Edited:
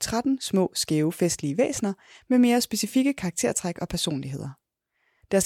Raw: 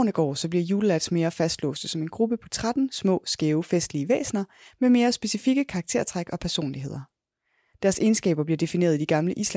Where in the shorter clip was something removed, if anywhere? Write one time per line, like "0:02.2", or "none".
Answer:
none